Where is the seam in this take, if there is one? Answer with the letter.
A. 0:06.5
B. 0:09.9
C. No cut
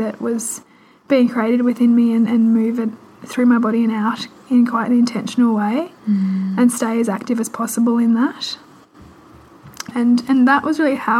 B